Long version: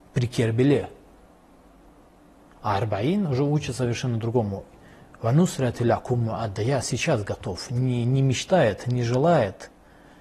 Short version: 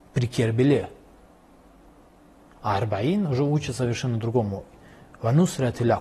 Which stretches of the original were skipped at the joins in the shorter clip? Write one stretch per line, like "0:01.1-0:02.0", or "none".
none